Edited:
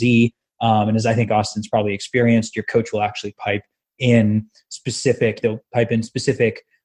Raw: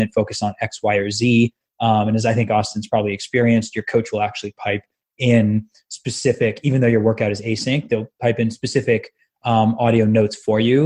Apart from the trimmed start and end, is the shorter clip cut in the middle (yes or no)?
yes